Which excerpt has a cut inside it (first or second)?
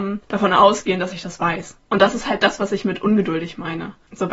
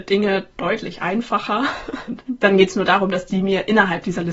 second